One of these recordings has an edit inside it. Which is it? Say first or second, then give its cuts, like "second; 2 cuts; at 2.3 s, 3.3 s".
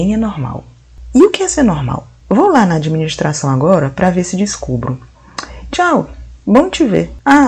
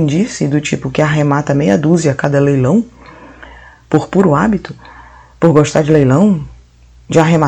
first; 2 cuts; at 2.2 s, 5.7 s